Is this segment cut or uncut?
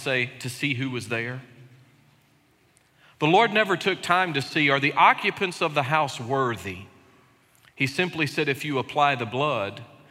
uncut